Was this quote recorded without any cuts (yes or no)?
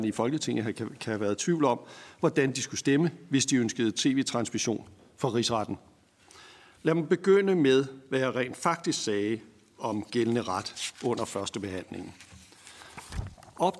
yes